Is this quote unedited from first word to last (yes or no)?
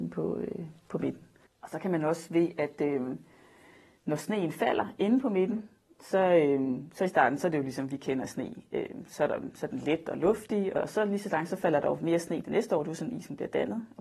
no